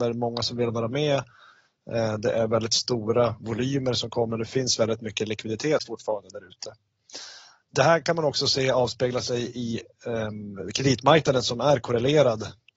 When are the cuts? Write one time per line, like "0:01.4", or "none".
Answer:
none